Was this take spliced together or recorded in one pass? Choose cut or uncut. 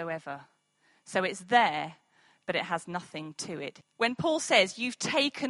cut